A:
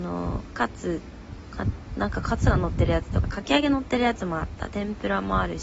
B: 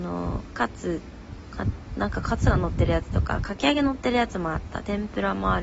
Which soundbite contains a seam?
A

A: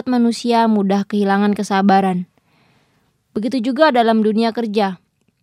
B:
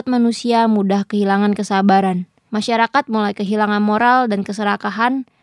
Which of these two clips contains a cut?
B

